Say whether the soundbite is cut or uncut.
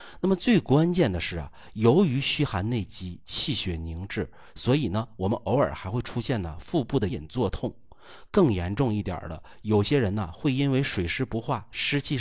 cut